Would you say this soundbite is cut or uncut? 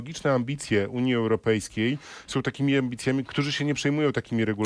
cut